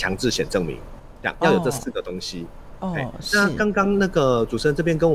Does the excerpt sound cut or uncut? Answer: uncut